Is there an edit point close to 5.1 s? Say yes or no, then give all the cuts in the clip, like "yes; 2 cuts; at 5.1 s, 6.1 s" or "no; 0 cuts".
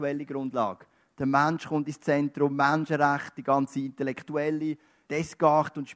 yes; 1 cut; at 5.1 s